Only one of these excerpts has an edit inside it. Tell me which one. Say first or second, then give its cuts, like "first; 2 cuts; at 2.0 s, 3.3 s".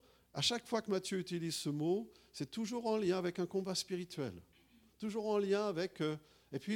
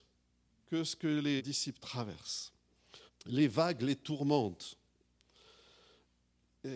second; 2 cuts; at 1.4 s, 3.1 s